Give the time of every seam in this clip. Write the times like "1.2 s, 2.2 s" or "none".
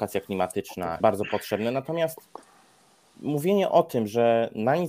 1.0 s